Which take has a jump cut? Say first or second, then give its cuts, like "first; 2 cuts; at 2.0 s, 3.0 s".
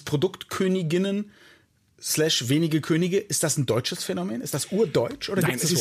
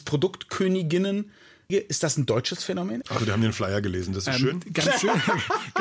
second; 2 cuts; at 1.7 s, 3.0 s